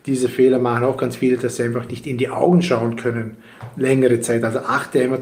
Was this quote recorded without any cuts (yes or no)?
yes